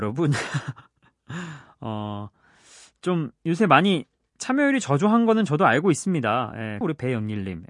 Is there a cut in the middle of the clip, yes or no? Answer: yes